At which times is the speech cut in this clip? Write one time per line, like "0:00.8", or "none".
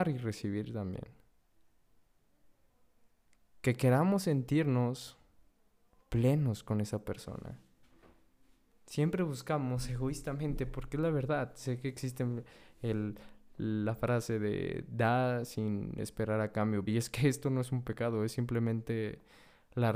0:16.9